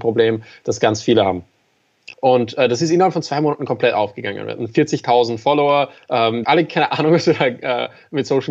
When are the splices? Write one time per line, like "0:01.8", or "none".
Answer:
0:02.1
0:06.4